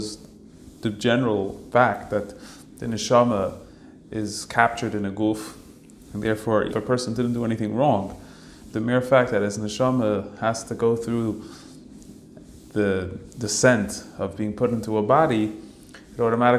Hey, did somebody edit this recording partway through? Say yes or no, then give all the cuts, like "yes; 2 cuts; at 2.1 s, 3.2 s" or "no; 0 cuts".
yes; 2 cuts; at 6.7 s, 8.7 s